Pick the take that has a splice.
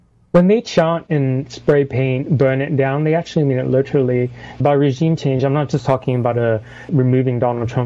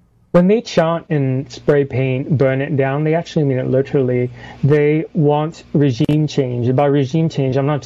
first; 2 cuts; at 4.6 s, 6.9 s

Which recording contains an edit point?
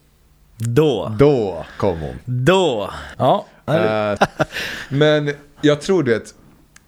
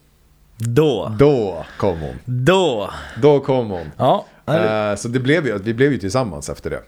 first; 2 cuts; at 3.1 s, 4.2 s

